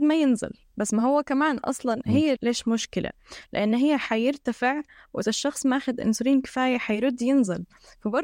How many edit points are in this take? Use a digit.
1